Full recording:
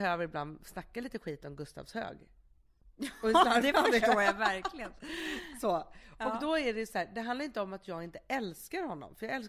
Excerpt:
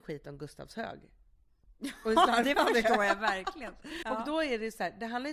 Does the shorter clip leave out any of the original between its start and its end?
yes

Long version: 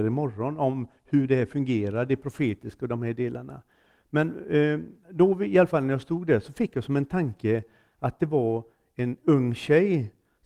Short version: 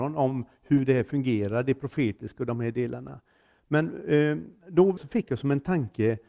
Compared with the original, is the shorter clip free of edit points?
no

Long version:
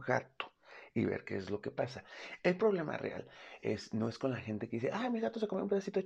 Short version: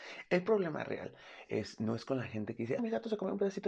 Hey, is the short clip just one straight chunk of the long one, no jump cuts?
no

